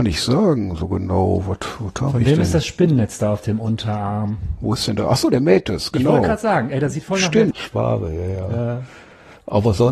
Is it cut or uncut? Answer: cut